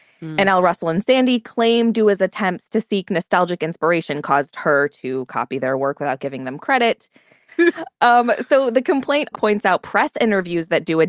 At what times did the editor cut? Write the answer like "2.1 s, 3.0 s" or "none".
7.5 s, 9.3 s

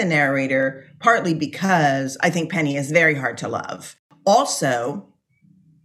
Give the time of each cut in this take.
none

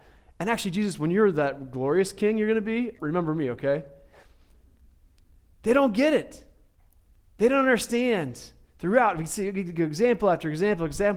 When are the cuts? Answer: 3.0 s

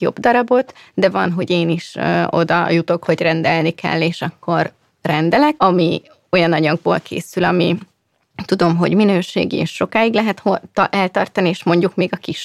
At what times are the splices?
5.6 s

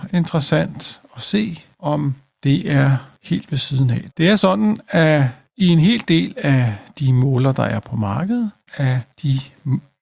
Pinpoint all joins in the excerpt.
4.1 s, 8.7 s

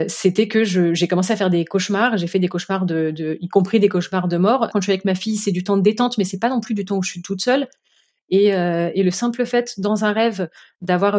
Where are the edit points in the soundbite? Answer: 4.7 s

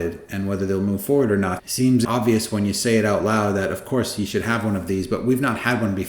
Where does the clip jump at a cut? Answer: 1.6 s

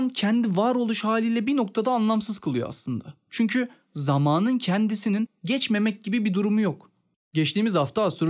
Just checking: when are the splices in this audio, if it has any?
7.1 s

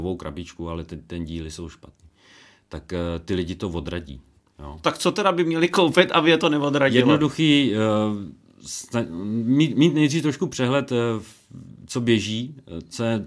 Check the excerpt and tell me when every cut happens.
none

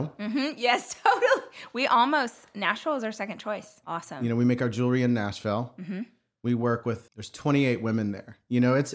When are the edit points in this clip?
3.8 s, 7.1 s

